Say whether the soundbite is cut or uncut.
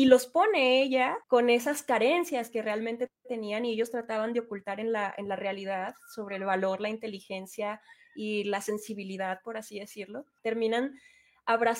cut